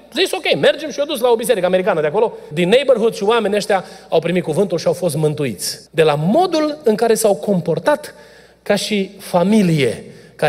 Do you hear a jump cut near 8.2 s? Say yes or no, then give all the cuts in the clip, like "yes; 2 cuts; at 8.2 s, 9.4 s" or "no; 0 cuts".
no; 2 cuts; at 2.5 s, 5.9 s